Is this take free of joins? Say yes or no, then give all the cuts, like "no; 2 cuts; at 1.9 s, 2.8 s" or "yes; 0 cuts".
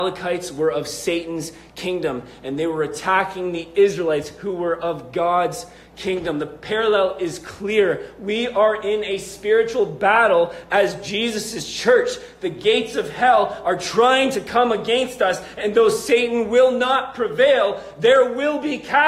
yes; 0 cuts